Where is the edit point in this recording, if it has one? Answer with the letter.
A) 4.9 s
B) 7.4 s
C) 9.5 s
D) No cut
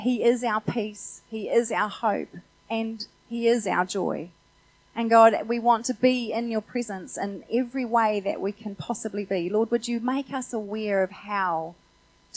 D